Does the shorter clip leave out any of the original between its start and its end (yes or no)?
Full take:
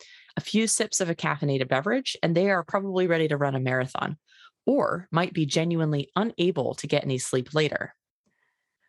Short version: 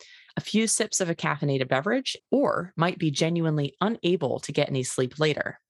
yes